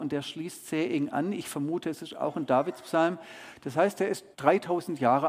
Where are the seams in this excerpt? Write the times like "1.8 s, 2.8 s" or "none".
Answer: 4.3 s